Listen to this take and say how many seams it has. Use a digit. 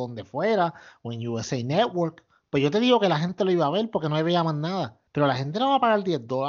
1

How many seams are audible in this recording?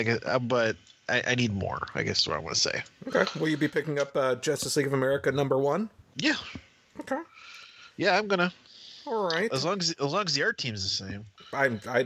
0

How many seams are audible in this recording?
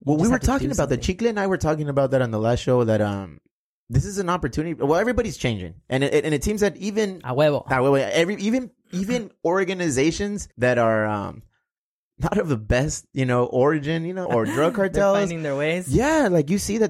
2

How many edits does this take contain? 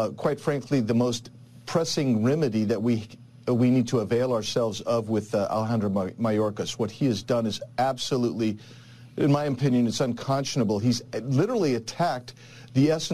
1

